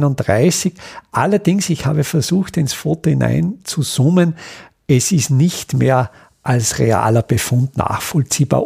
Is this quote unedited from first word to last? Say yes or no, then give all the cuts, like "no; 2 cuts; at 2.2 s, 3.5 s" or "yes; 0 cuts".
yes; 0 cuts